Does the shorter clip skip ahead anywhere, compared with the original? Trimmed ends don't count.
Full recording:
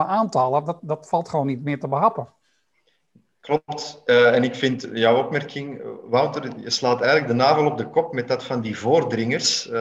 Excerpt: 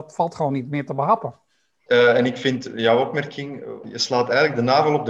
yes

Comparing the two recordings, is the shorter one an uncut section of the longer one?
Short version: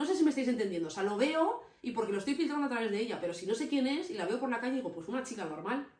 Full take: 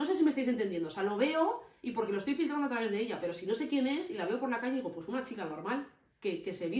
yes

